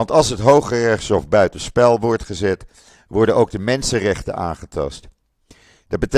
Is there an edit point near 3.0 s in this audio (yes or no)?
no